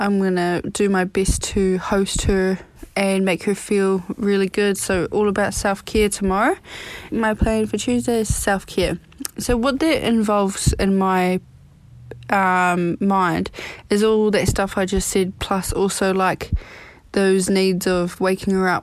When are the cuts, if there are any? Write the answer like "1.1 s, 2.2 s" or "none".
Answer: 7.1 s